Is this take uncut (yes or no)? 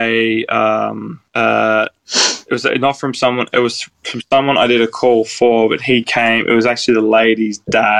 no